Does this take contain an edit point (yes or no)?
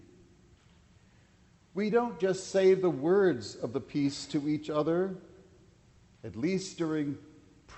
no